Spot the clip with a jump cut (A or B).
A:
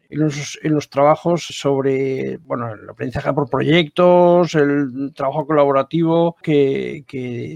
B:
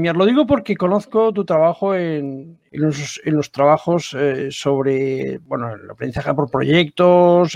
A